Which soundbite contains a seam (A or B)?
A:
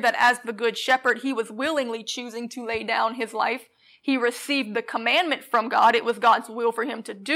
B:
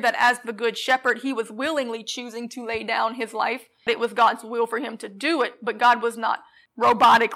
B